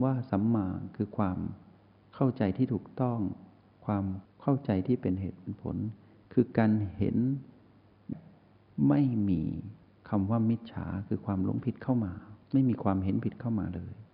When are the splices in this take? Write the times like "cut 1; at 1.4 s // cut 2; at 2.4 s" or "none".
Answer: cut 1; at 8.1 s // cut 2; at 12.4 s